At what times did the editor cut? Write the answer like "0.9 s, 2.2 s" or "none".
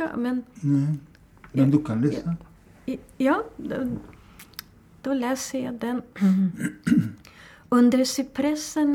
none